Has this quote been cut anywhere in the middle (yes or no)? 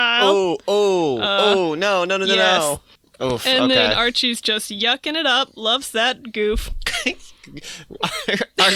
no